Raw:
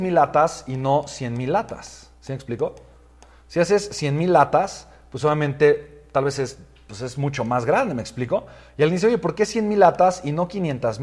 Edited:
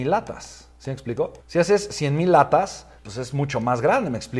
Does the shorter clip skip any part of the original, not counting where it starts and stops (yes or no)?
yes